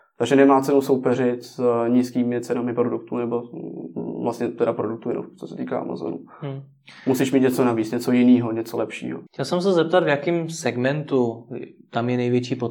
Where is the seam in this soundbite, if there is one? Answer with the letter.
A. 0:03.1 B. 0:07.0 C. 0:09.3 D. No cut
C